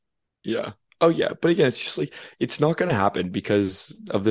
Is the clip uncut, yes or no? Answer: yes